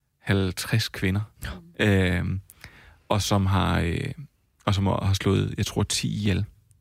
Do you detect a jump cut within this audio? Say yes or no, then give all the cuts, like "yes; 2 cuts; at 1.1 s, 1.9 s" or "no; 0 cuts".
no; 0 cuts